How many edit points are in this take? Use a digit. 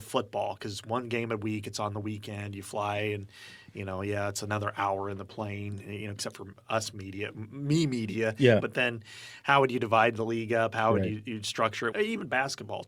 2